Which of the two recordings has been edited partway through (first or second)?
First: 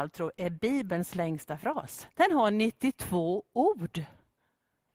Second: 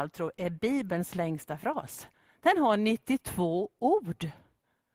first